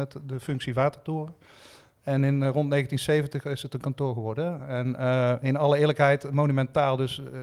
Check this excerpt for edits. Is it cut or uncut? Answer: uncut